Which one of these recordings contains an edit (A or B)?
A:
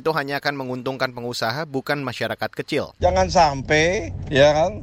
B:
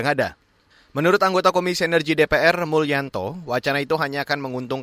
A